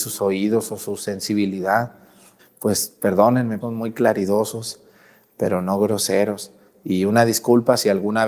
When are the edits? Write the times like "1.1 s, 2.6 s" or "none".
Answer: 2.4 s, 3.6 s